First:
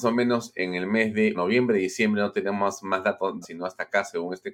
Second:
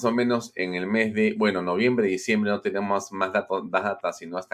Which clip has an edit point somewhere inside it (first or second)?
first